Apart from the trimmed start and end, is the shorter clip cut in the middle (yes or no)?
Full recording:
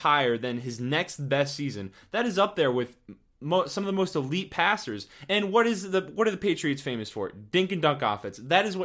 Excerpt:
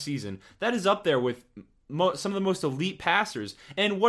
no